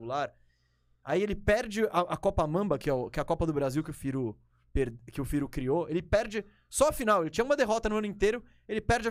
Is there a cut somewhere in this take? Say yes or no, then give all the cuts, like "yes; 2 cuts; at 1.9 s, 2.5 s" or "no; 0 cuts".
no; 0 cuts